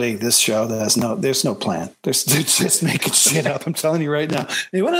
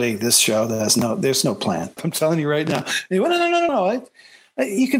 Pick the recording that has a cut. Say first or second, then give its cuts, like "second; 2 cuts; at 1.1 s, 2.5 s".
second; 2 cuts; at 2.0 s, 3.7 s